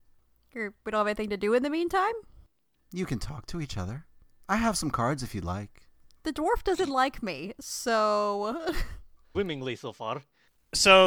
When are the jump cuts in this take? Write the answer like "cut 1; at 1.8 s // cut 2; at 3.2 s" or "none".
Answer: cut 1; at 9.3 s